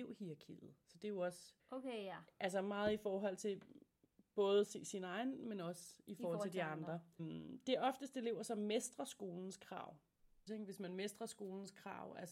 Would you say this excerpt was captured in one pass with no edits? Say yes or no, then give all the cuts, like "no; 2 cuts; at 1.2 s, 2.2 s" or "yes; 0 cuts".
no; 3 cuts; at 1.6 s, 7.2 s, 10.5 s